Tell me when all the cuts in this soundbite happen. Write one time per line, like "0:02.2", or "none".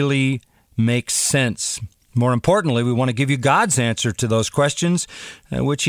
none